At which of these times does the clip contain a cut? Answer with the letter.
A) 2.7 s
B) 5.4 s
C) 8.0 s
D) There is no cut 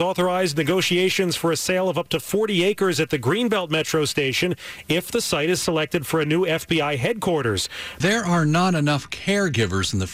C